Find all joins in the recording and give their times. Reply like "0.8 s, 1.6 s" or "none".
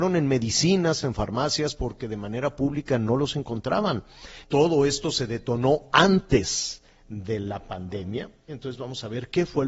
1.0 s, 4.4 s, 8.5 s